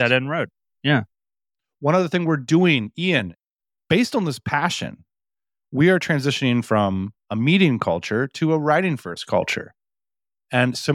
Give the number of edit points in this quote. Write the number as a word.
zero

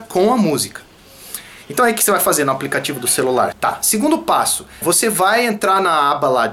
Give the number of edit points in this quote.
two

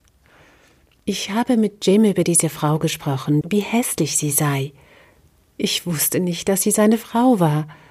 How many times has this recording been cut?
one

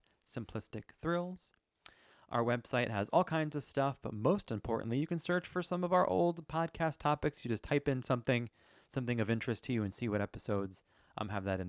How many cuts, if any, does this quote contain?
zero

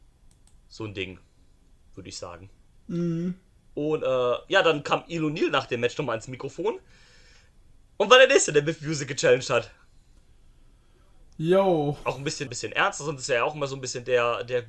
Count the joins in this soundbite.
one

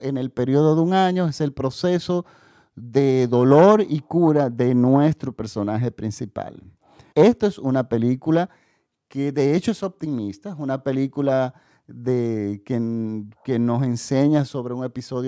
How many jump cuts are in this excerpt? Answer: one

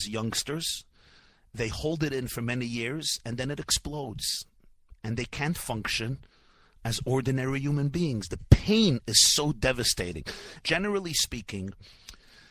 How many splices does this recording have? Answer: one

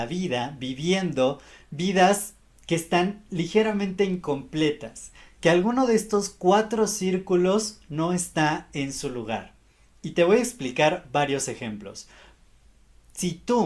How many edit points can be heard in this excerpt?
zero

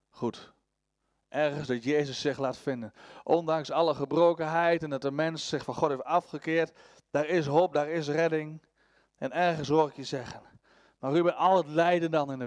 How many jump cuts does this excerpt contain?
zero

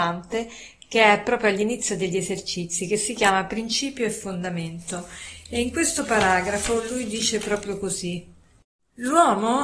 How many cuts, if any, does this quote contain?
zero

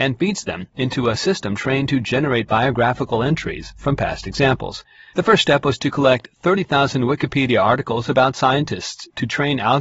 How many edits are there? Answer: one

